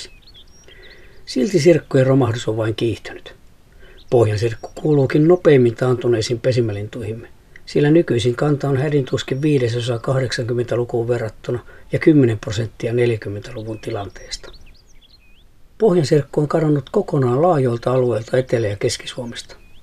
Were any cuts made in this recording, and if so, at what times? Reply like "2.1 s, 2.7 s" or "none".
none